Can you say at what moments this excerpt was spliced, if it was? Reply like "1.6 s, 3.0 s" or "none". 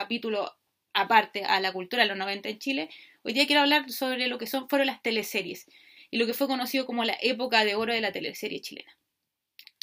none